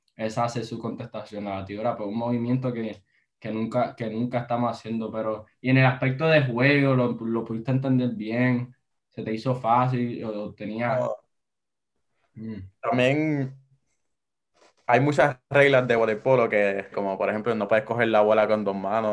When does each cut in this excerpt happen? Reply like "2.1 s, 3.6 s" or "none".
16.9 s